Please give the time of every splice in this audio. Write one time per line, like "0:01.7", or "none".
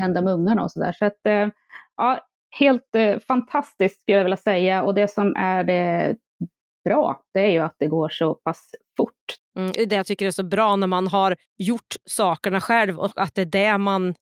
0:09.4
0:11.5